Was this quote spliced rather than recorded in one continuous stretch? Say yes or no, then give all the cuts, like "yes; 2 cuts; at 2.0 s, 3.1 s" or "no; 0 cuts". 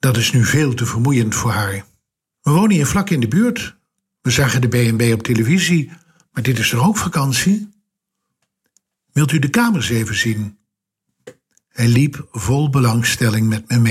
yes; 1 cut; at 2.3 s